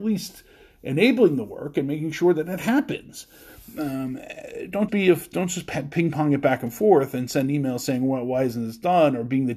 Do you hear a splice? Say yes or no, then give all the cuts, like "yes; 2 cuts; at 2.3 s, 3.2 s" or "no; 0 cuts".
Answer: yes; 1 cut; at 4.9 s